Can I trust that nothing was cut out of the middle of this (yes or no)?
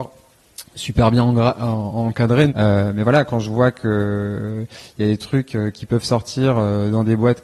no